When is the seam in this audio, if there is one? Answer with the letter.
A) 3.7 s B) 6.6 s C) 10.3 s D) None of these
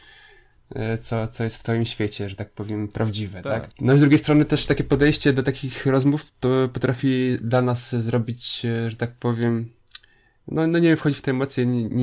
A